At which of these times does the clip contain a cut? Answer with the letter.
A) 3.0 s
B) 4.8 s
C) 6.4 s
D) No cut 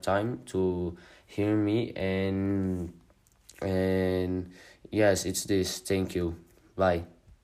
D